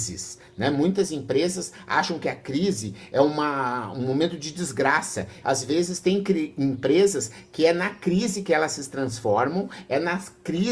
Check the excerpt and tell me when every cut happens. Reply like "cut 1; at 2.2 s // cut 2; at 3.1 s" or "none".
cut 1; at 5.4 s